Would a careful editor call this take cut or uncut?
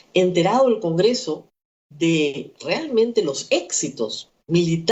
uncut